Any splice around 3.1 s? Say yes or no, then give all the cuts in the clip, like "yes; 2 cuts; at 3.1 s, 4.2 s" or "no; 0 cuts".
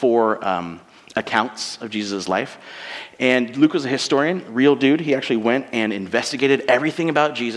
no; 0 cuts